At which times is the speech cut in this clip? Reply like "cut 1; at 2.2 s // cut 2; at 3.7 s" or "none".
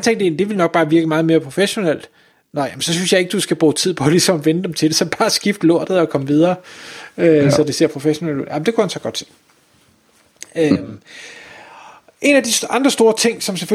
none